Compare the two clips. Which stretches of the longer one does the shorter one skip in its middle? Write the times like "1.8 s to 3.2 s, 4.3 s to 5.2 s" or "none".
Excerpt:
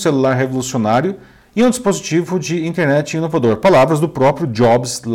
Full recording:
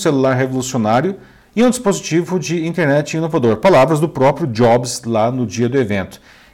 none